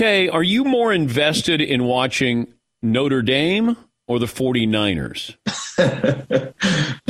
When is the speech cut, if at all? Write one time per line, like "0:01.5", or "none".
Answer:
0:05.4